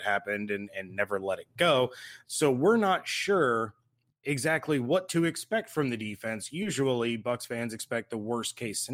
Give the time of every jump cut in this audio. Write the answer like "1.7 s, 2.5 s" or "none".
2.2 s